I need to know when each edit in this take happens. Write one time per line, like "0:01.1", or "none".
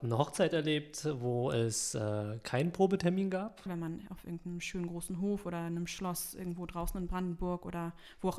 0:03.7